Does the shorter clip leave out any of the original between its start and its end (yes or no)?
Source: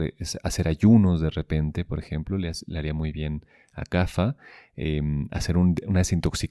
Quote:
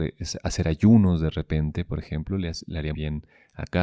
yes